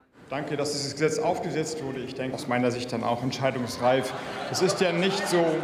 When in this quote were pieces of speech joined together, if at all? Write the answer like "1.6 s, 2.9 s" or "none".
2.3 s

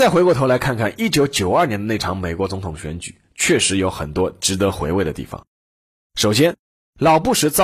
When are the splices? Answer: none

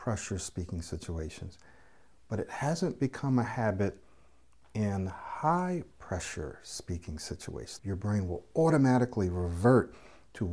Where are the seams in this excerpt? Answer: 7.8 s

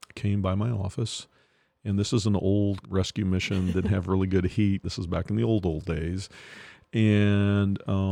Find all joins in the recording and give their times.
2.8 s, 4.8 s

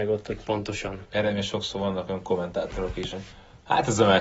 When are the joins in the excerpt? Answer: 1.1 s, 3.1 s

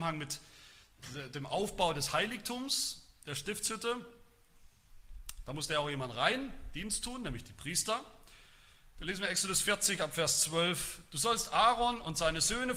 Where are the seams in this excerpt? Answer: none

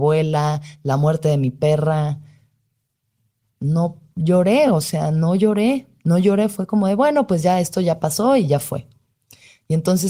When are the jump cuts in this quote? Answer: none

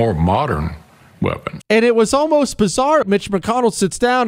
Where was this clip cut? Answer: 1.6 s, 3.0 s

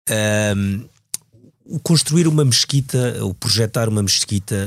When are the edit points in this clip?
none

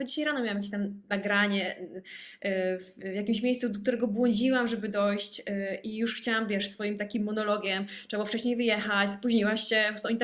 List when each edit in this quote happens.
none

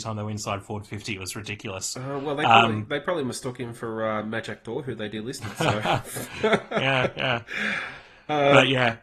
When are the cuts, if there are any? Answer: none

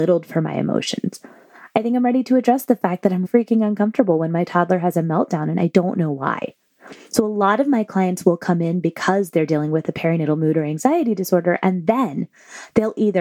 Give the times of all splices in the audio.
3.2 s

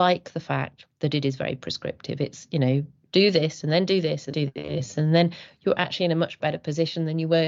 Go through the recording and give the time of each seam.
4.3 s

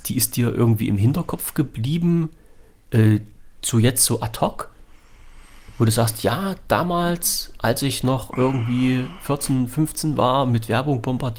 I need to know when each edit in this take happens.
none

